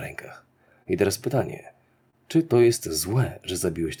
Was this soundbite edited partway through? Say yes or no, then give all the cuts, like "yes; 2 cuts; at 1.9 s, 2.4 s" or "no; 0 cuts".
no; 0 cuts